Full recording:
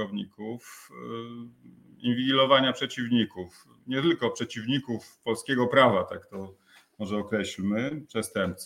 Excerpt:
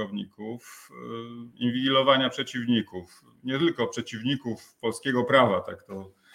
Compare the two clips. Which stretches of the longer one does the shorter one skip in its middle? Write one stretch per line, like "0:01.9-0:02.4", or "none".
0:01.5-0:01.9